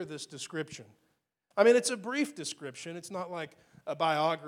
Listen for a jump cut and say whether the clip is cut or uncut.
uncut